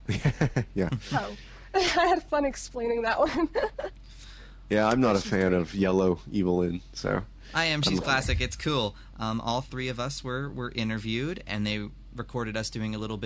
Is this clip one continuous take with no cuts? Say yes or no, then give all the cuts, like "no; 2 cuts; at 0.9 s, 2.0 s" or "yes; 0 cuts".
no; 1 cut; at 9.1 s